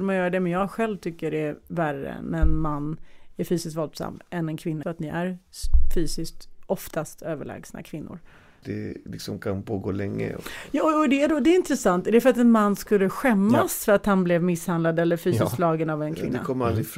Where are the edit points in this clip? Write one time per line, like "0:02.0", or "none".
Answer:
0:04.8
0:08.6

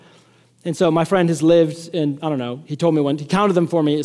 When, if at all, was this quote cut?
0:02.6

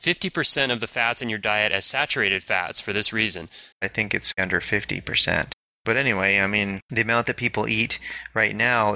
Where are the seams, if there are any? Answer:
0:03.7

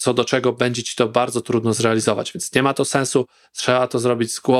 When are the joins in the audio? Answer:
none

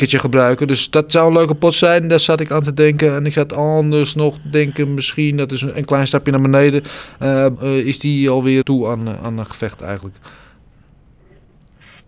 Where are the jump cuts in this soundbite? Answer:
0:07.6
0:08.6

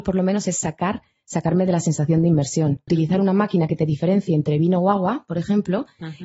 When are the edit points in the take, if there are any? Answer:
0:02.9

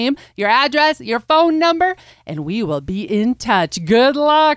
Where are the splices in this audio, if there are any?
none

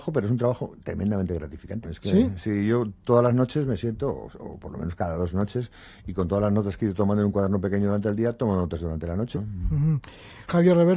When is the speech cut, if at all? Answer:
0:01.8
0:09.3

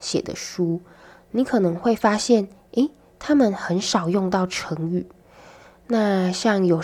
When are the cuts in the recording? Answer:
none

